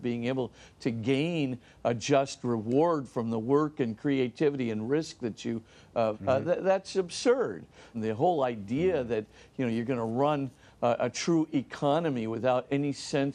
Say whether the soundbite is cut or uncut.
cut